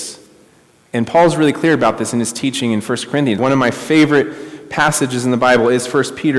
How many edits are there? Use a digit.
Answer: 1